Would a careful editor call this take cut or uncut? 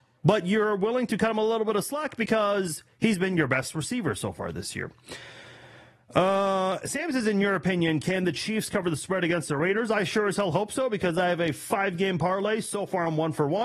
uncut